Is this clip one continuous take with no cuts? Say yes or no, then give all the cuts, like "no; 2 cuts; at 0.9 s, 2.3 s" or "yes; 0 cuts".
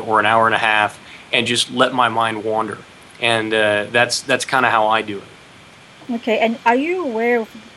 yes; 0 cuts